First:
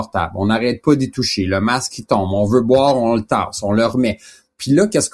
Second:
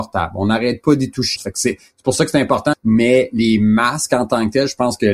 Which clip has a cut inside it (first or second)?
second